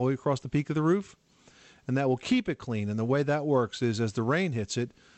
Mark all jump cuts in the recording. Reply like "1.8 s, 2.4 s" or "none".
none